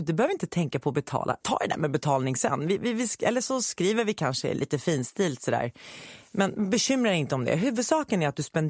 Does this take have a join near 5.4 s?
no; 1 cut; at 1.4 s

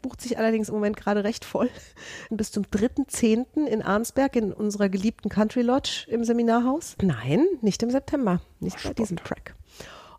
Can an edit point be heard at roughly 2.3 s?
yes; 2 cuts; at 2.3 s, 7.0 s

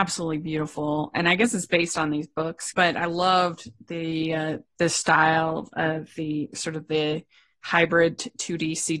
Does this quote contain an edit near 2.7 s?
yes; 1 cut; at 2.7 s

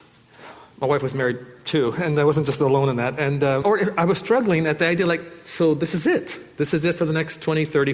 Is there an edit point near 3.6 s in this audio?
yes; 1 cut; at 3.6 s

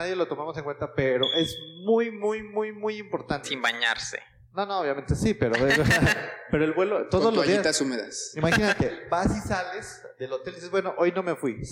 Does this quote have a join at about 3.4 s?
yes; 1 cut; at 3.4 s

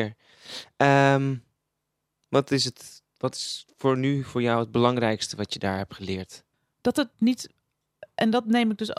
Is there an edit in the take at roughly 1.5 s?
no; 0 cuts

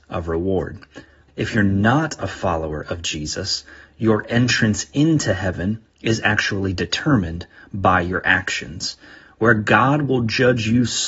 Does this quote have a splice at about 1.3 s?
yes; 1 cut; at 1.3 s

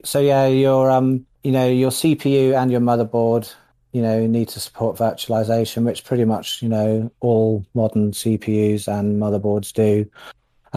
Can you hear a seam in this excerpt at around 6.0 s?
no; 1 cut; at 1.3 s

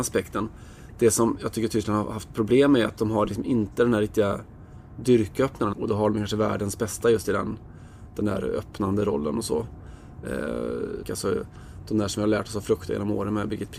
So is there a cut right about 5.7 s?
yes; 2 cuts; at 5.7 s, 11.0 s

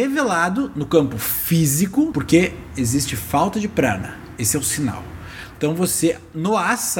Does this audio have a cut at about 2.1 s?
yes; 1 cut; at 2.1 s

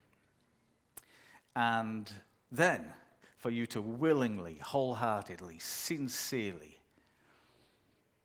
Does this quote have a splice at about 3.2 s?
yes; 1 cut; at 3.2 s

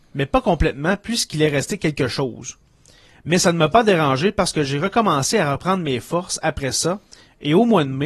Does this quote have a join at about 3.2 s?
no; 0 cuts

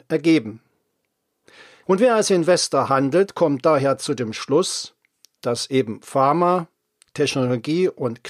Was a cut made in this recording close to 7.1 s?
yes; 2 cuts; at 1.8 s, 7.1 s

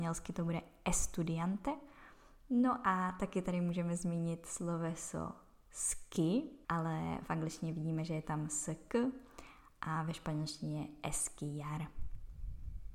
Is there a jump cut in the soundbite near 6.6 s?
yes; 1 cut; at 6.6 s

